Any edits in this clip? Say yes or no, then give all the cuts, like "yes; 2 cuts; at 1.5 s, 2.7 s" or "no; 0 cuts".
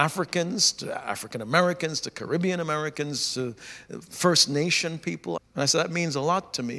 yes; 1 cut; at 5.4 s